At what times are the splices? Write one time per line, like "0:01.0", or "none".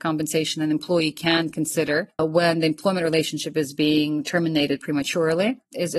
0:02.2